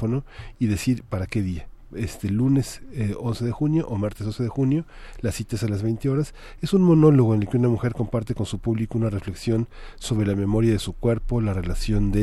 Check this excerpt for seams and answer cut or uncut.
uncut